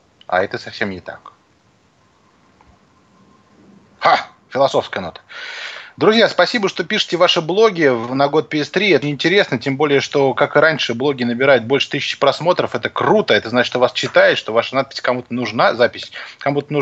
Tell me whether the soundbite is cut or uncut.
cut